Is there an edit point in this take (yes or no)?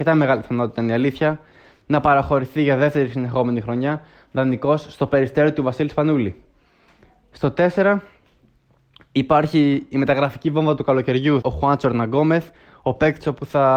yes